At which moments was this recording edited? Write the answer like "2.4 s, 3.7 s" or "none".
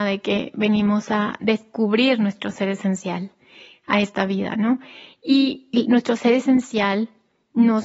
none